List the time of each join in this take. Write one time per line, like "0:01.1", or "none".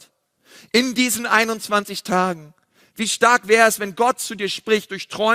none